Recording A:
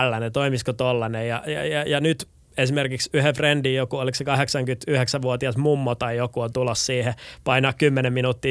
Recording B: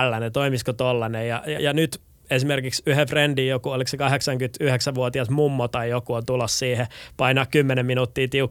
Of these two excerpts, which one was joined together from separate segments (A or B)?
B